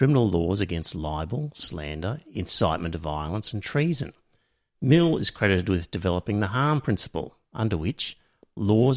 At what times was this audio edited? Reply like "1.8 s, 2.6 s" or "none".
none